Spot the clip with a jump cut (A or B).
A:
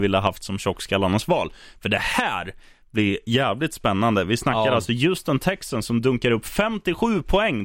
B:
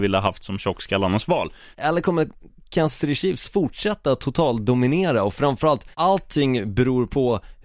B